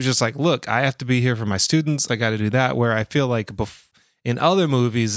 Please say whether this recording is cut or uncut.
cut